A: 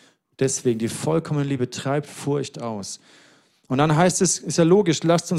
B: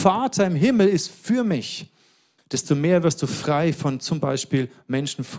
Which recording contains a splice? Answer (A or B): B